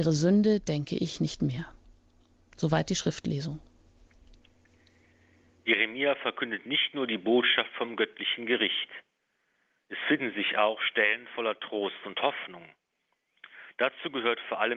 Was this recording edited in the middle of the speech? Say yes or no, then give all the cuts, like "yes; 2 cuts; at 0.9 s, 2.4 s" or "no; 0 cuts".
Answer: no; 0 cuts